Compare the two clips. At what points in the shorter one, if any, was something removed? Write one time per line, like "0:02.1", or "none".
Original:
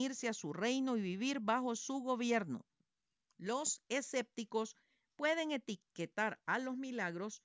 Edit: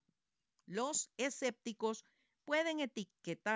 none